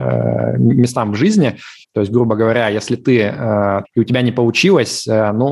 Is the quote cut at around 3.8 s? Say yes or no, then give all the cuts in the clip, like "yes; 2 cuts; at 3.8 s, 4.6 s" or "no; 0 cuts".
yes; 2 cuts; at 1.8 s, 3.8 s